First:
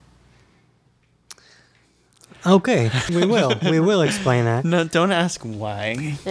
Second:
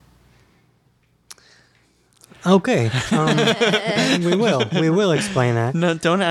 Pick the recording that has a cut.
first; 1 cut; at 3.1 s

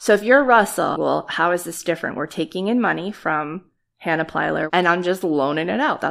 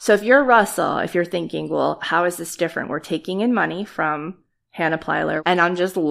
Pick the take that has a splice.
first; 1 cut; at 0.9 s

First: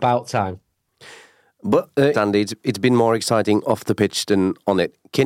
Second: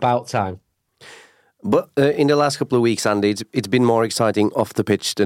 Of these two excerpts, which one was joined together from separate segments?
first; 1 cut; at 2.1 s

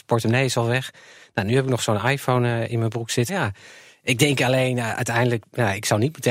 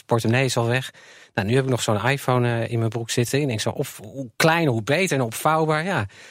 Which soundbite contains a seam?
first; 1 cut; at 3.3 s

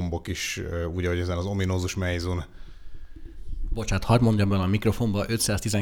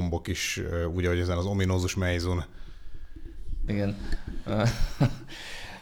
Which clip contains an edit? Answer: second; 1 cut; at 3.7 s

